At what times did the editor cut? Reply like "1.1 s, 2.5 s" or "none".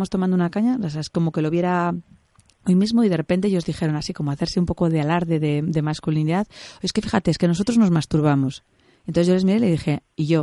none